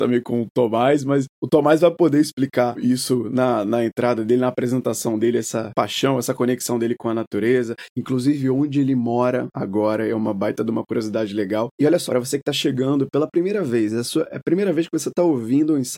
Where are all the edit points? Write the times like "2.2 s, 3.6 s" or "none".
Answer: 12.1 s